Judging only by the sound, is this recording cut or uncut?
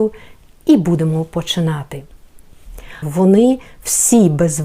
cut